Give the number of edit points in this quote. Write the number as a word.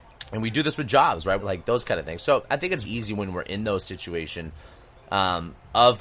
two